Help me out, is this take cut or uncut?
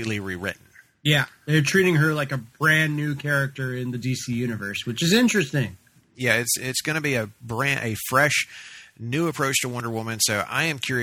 uncut